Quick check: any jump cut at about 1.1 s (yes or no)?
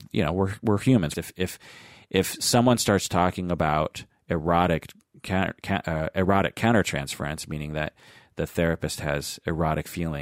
yes